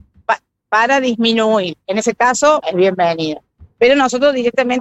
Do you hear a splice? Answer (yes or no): yes